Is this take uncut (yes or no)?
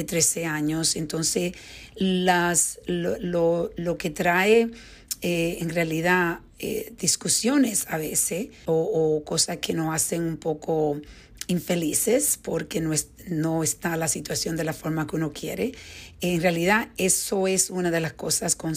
no